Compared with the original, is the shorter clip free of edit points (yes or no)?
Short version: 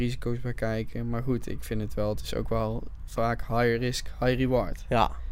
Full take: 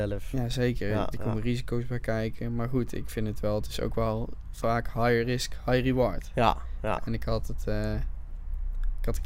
yes